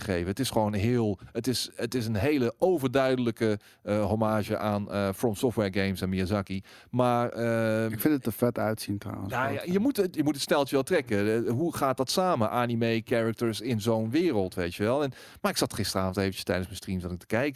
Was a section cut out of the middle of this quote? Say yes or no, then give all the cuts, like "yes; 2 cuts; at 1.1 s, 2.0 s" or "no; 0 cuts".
no; 0 cuts